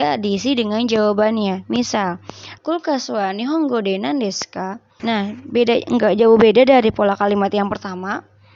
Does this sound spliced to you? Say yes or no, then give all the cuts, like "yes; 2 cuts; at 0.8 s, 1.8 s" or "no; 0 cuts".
yes; 2 cuts; at 2.6 s, 5.0 s